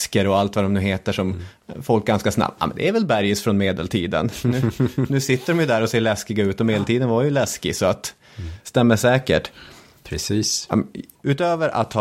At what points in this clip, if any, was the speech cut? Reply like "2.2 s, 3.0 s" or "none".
none